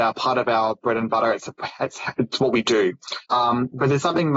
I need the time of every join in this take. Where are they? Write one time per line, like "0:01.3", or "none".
0:03.2